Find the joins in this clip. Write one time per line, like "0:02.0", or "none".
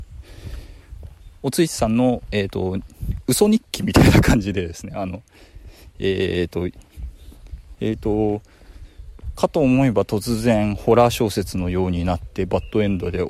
0:07.7